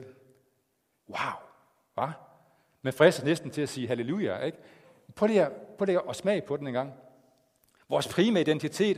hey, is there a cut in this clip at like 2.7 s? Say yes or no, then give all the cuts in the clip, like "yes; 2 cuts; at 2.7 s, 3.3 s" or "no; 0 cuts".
no; 1 cut; at 1.0 s